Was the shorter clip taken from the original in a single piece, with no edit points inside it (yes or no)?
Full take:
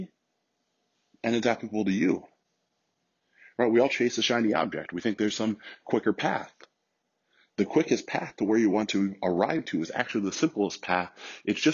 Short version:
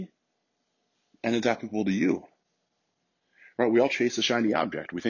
yes